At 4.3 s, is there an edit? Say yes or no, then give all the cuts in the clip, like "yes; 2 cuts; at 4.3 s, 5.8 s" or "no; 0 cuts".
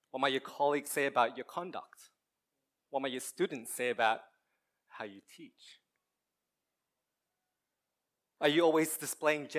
no; 2 cuts; at 2.8 s, 8.4 s